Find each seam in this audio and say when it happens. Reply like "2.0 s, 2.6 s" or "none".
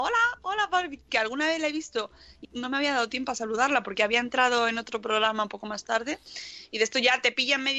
1.1 s, 2.4 s